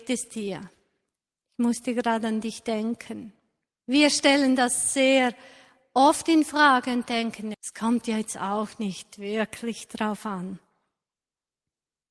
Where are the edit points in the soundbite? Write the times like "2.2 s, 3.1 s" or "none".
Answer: 7.5 s